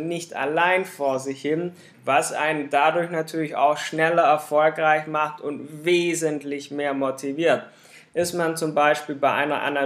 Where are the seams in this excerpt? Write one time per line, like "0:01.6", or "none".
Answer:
0:01.9